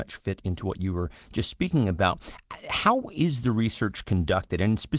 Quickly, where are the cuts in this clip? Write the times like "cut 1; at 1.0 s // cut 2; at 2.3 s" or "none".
none